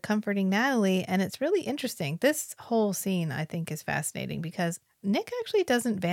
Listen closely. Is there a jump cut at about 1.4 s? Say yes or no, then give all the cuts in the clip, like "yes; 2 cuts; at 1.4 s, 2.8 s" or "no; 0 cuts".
no; 0 cuts